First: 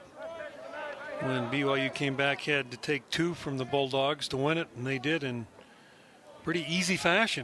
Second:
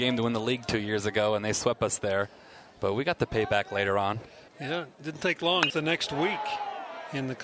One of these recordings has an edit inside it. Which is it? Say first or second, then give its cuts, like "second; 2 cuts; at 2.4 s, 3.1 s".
second; 2 cuts; at 4.5 s, 5.7 s